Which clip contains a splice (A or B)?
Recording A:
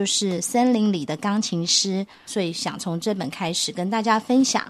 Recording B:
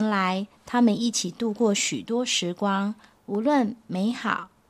A